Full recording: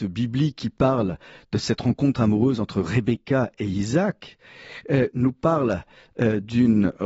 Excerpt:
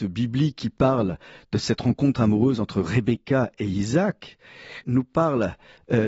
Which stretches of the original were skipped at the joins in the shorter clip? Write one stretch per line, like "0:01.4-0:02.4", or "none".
0:04.8-0:05.1